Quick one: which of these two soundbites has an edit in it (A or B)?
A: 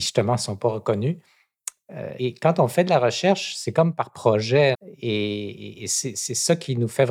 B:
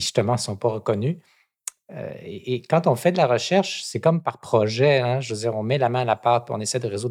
A